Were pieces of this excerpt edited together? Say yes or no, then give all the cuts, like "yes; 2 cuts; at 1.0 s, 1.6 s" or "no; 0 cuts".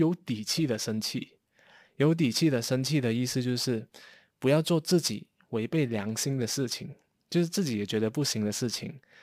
no; 0 cuts